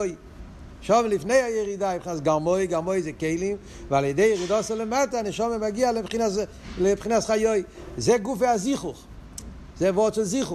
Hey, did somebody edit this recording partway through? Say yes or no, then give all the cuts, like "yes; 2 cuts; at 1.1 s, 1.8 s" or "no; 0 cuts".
no; 0 cuts